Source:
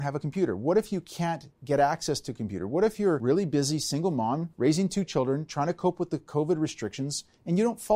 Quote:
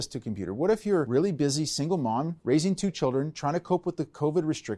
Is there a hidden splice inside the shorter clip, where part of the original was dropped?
no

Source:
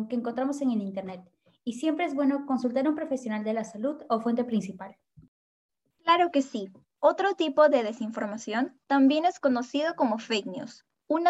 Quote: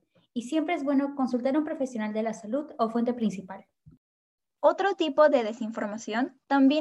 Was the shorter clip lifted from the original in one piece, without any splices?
no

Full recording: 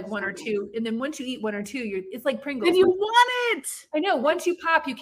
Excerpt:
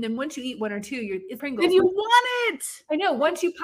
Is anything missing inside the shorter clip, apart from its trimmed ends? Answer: yes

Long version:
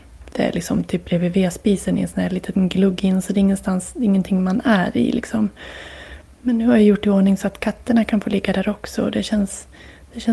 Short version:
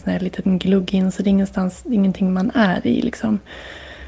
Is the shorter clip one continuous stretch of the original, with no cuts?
yes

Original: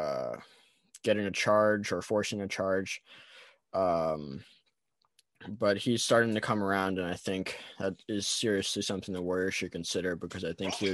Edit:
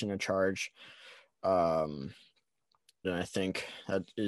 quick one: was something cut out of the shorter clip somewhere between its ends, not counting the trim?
yes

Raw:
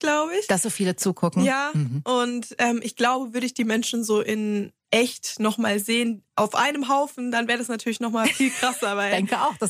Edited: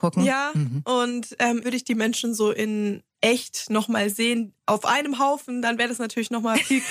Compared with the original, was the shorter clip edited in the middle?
yes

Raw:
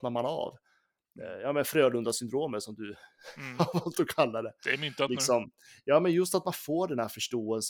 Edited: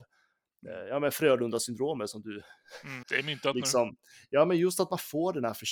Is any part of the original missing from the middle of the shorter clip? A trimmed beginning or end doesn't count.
yes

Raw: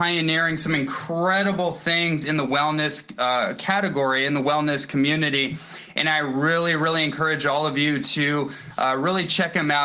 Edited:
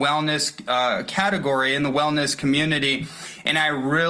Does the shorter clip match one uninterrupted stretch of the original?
yes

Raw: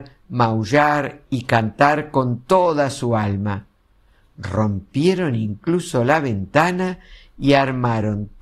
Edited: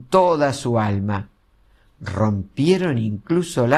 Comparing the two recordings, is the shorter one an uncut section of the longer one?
yes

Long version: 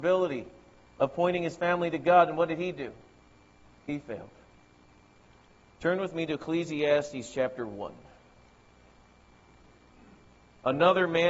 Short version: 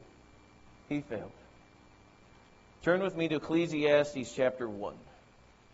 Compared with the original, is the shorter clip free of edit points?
yes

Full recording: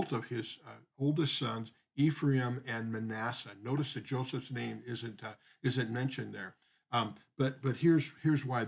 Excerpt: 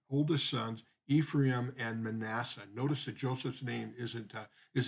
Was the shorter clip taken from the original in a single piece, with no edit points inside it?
yes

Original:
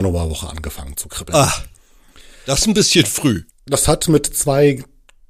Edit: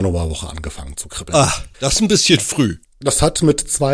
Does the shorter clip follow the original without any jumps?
no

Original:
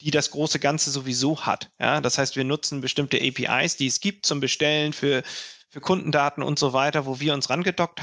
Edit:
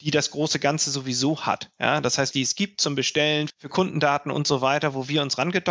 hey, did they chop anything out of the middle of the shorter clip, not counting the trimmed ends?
yes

